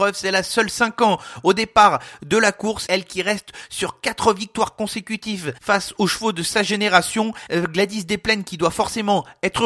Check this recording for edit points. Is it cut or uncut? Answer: cut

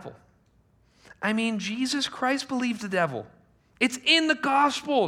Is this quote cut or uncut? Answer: uncut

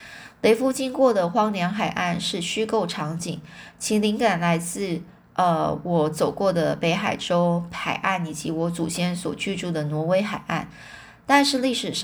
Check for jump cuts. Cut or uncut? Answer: uncut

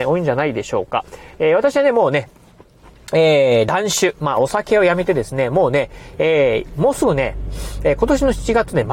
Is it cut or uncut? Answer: uncut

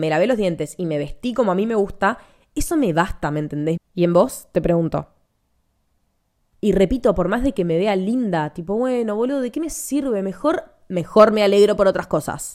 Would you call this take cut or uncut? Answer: cut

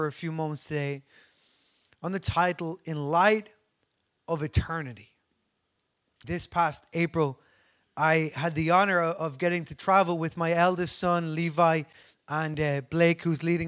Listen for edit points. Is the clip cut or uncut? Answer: cut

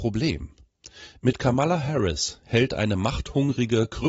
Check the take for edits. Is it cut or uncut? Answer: cut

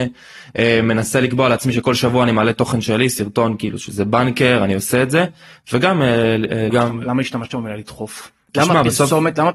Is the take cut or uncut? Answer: cut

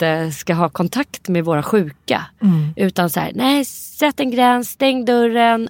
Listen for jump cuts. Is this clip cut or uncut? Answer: uncut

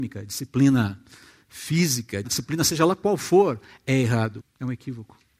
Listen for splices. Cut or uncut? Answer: cut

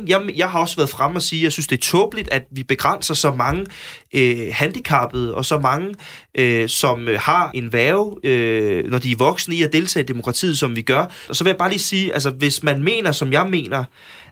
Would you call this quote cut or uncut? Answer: cut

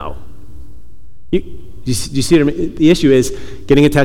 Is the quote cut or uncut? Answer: uncut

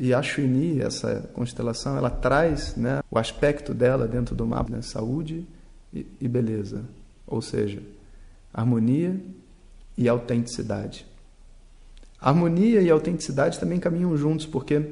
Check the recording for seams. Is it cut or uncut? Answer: cut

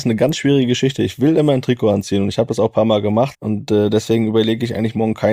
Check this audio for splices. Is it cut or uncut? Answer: cut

